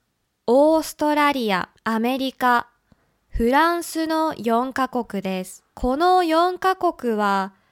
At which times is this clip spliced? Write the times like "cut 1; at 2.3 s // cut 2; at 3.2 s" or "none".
cut 1; at 1.8 s // cut 2; at 5.7 s